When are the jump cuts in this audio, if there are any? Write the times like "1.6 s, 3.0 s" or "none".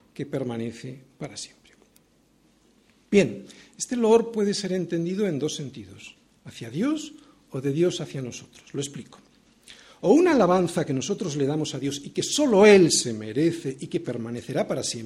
none